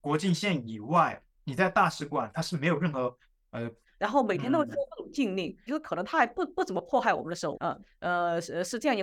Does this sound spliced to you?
yes; 3 cuts; at 3.8 s, 5.7 s, 7.5 s

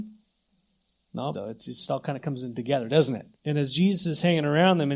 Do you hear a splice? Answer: yes; 2 cuts; at 1.3 s, 3.4 s

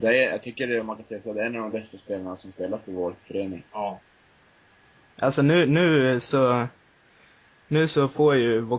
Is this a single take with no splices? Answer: yes; 0 cuts

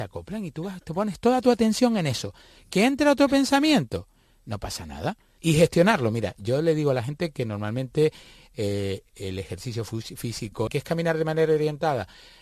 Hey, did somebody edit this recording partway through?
yes; 2 cuts; at 5.4 s, 10.7 s

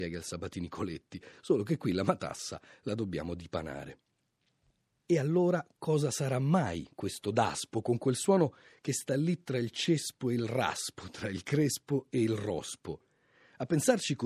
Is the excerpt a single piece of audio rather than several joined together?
yes; 0 cuts

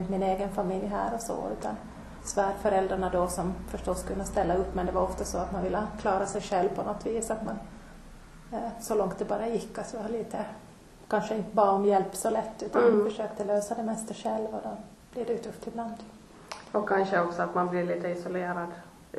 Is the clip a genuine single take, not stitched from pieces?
yes; 0 cuts

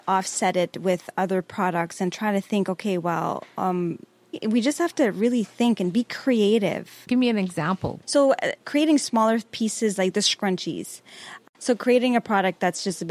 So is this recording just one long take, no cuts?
no; 1 cut; at 8.0 s

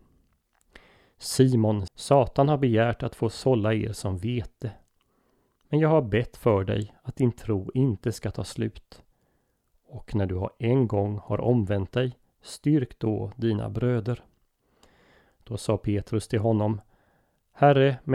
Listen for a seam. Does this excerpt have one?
yes; 1 cut; at 1.9 s

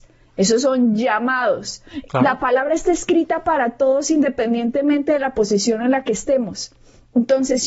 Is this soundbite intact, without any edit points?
no; 1 cut; at 2.1 s

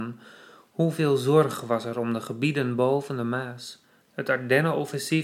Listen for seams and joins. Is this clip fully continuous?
no; 1 cut; at 4.0 s

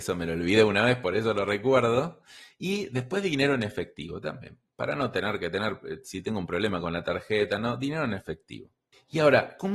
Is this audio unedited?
yes; 0 cuts

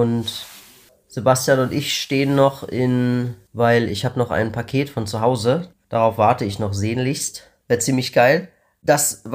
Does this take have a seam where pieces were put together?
yes; 3 cuts; at 3.5 s, 5.7 s, 7.6 s

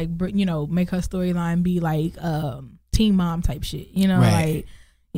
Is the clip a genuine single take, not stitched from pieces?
yes; 0 cuts

